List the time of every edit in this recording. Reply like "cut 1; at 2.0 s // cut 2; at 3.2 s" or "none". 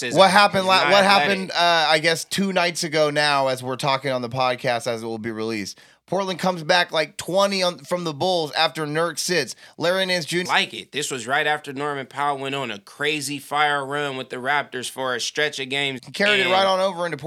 cut 1; at 10.4 s // cut 2; at 16.0 s